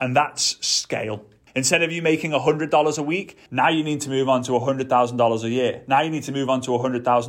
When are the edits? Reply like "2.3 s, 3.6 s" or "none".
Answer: 1.5 s, 3.5 s